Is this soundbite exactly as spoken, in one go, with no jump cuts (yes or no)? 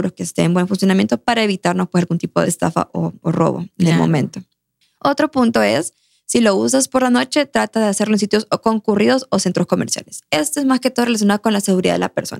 yes